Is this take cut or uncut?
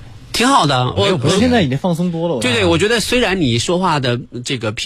cut